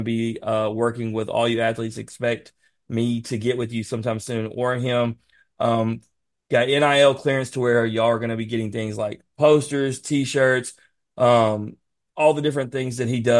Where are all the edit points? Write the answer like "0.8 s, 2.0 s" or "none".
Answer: none